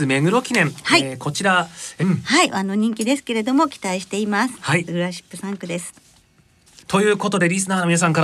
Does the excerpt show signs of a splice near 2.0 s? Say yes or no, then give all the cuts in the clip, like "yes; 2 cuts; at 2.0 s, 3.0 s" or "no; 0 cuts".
yes; 1 cut; at 2.0 s